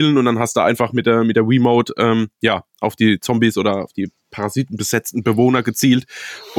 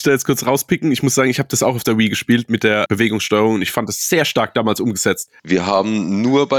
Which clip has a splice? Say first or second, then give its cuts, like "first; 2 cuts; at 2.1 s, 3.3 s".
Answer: second; 2 cuts; at 2.9 s, 5.4 s